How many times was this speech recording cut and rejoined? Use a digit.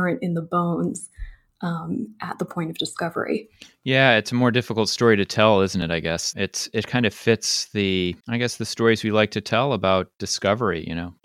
2